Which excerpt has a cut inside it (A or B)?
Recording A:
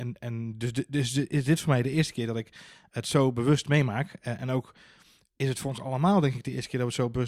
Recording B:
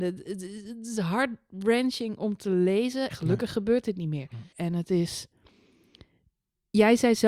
B